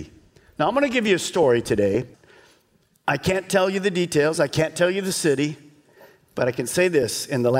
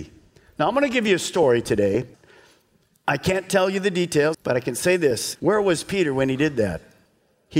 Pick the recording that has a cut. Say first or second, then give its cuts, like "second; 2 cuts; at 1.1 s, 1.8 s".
second; 2 cuts; at 4.3 s, 5.4 s